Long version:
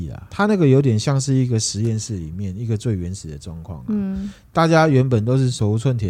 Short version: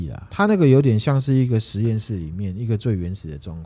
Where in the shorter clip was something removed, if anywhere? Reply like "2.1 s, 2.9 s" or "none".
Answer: none